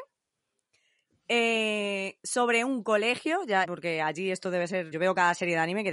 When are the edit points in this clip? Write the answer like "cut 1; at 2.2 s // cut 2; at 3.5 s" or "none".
cut 1; at 3.6 s // cut 2; at 4.9 s